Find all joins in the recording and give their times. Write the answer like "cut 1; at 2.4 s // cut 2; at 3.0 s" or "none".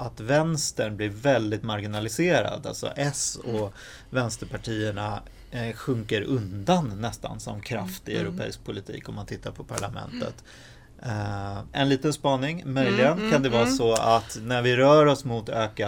cut 1; at 11.7 s